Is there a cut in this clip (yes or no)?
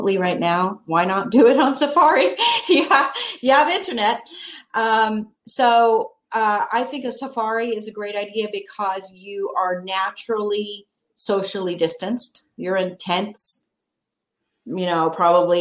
no